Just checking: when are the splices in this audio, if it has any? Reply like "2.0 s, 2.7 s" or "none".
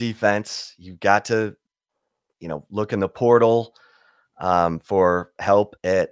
none